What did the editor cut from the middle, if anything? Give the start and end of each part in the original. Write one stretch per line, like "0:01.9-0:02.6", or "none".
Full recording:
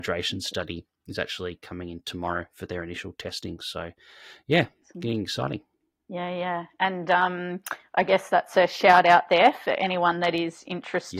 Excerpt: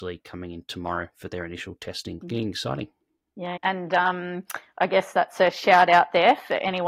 0:03.6-0:04.9
0:06.3-0:06.7